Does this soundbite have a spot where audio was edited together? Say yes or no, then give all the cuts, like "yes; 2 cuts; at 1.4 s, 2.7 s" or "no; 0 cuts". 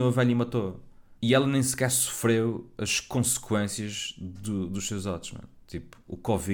yes; 1 cut; at 1.2 s